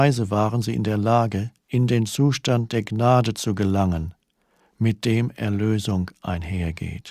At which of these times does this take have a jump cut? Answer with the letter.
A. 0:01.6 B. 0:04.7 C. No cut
A